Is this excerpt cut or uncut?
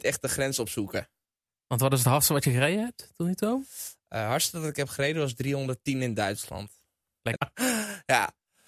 cut